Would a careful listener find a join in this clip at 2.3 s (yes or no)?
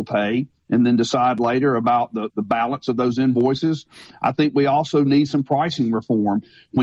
yes